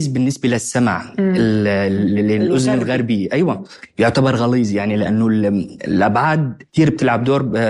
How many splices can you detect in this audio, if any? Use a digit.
1